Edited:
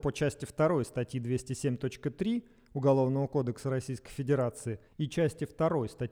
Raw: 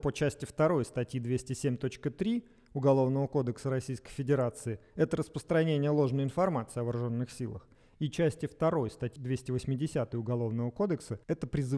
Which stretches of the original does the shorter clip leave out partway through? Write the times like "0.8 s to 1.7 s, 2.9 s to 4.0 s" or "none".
4.9 s to 7.9 s